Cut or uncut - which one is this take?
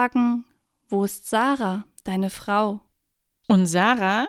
cut